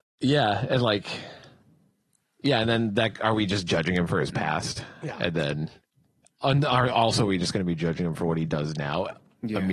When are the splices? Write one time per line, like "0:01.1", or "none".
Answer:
none